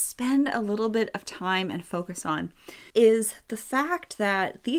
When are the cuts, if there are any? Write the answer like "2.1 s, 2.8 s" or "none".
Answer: 2.9 s